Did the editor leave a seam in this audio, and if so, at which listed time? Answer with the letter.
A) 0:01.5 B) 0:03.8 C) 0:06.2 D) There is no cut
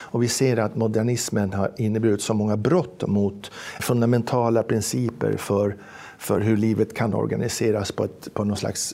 B